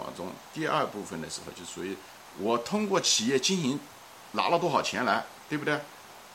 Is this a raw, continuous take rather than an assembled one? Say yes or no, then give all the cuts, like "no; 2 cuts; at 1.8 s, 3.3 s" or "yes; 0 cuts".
no; 1 cut; at 2.3 s